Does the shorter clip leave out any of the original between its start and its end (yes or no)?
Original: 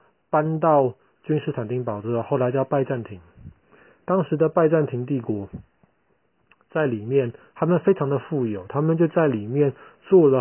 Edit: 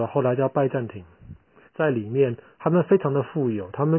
yes